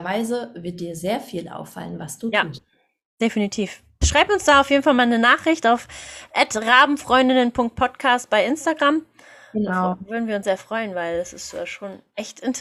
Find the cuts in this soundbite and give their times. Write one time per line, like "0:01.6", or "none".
0:10.4